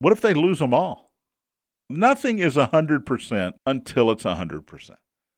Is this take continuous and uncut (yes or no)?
no